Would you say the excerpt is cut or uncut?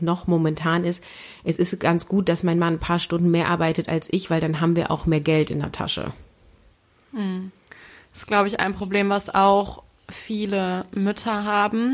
uncut